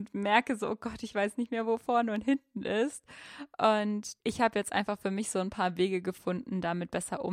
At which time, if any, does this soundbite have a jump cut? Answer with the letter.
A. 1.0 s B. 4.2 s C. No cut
B